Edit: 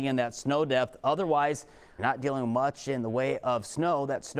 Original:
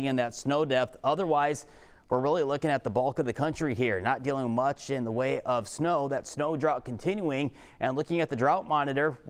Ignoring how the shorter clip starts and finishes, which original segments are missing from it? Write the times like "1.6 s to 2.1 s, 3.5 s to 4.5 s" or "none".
2.0 s to 4.0 s